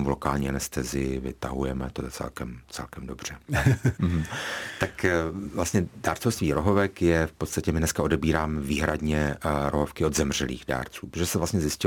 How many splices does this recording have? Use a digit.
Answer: 1